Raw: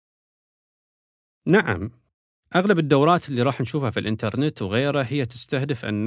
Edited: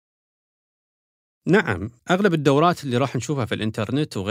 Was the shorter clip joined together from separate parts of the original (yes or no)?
yes